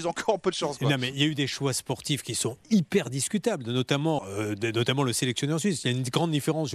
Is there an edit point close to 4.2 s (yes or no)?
yes